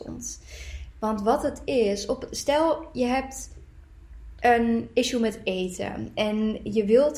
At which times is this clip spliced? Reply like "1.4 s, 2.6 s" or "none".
0.9 s